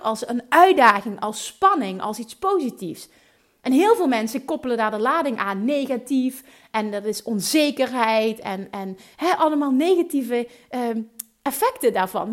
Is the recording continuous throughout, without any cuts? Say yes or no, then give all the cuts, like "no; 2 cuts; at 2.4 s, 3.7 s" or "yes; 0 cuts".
yes; 0 cuts